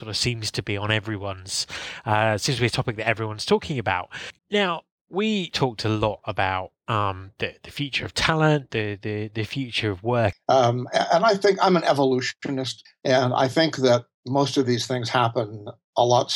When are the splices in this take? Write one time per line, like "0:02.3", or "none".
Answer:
0:04.4
0:10.3
0:12.9